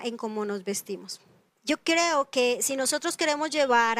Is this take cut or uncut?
uncut